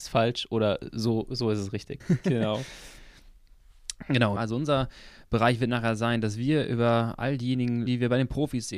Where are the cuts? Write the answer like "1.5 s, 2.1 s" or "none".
2.0 s, 4.4 s, 7.9 s